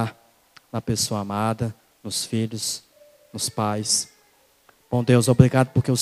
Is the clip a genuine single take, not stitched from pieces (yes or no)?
yes